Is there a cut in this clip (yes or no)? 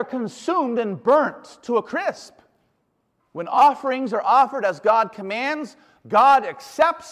yes